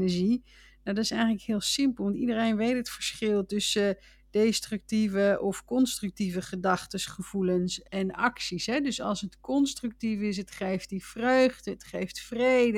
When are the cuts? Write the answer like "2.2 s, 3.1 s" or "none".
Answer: 7.8 s